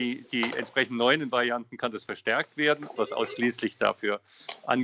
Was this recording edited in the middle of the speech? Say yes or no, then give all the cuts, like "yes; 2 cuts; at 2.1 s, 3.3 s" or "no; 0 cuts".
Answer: yes; 1 cut; at 3.0 s